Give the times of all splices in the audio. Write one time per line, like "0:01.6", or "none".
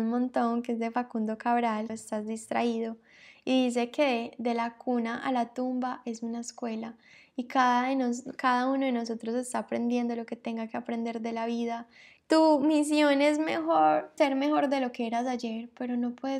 0:01.9
0:12.2
0:14.2